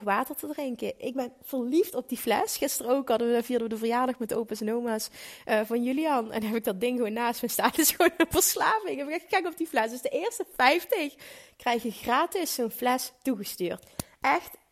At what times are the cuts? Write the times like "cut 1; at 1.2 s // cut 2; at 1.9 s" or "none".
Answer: none